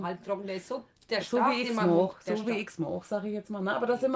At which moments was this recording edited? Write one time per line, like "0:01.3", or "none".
none